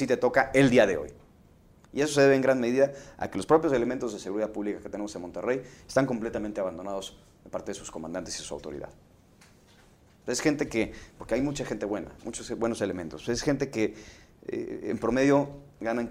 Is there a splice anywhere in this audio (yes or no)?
yes